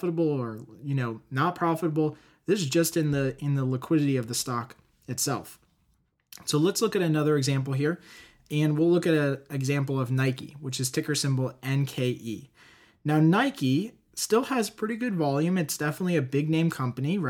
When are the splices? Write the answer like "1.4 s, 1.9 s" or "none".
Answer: none